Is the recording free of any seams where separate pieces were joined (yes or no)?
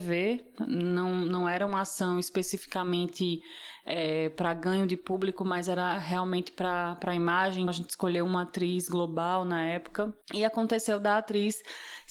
no